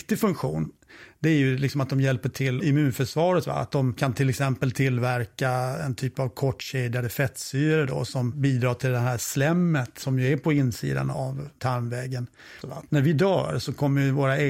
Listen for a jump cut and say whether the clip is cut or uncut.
cut